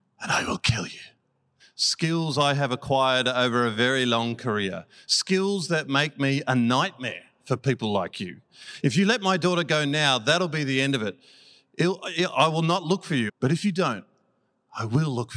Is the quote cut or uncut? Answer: cut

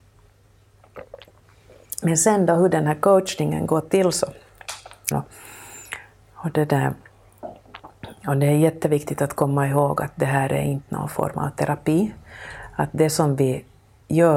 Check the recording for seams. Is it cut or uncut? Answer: cut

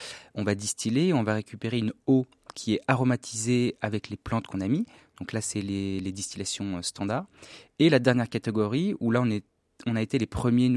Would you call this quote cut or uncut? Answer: uncut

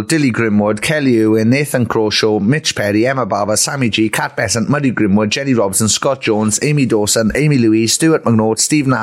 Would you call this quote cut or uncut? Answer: uncut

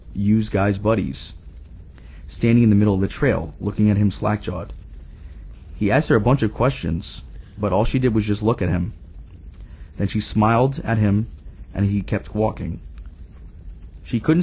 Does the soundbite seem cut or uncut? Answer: uncut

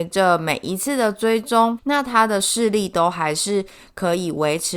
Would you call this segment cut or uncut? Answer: cut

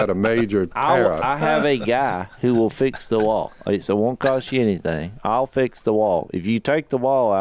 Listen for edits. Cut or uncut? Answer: uncut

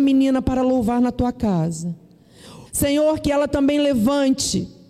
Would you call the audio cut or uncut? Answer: cut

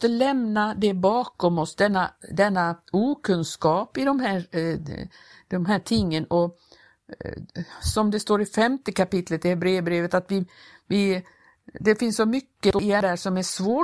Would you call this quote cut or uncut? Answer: uncut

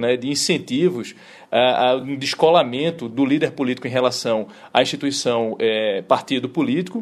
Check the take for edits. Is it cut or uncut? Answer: uncut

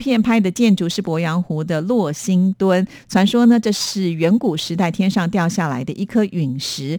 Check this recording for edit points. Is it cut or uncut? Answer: uncut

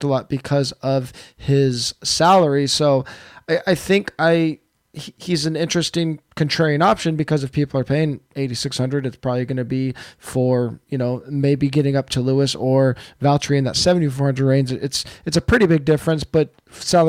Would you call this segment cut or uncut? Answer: uncut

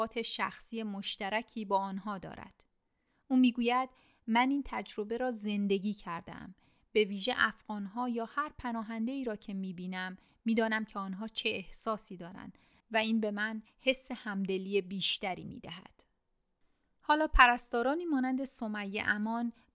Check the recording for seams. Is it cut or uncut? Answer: uncut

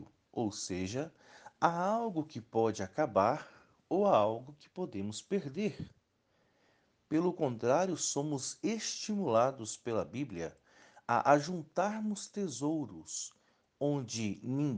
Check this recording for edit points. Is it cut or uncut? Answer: uncut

